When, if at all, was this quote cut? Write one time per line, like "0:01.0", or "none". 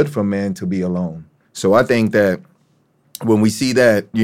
0:01.4